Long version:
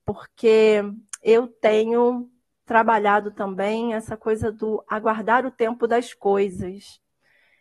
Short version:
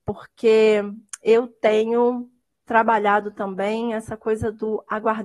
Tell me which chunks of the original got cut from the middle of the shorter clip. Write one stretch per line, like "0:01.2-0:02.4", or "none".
none